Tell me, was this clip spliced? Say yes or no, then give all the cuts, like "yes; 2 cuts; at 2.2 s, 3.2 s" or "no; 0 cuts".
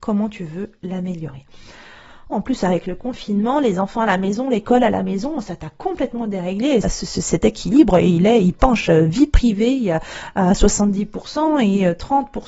yes; 2 cuts; at 2.3 s, 6.8 s